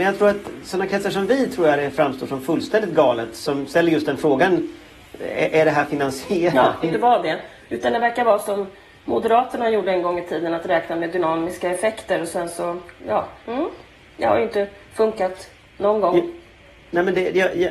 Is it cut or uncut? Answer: cut